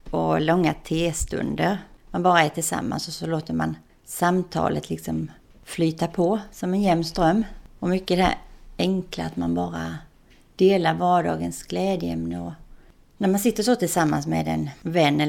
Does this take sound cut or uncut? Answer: uncut